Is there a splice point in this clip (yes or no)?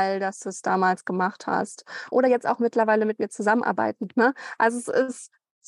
no